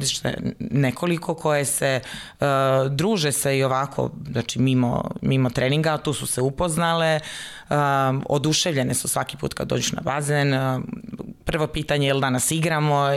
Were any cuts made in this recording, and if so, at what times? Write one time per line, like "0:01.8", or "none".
none